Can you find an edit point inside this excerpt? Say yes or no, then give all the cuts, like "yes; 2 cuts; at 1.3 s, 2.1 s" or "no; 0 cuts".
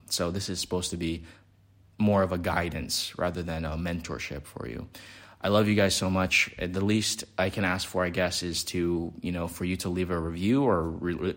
no; 0 cuts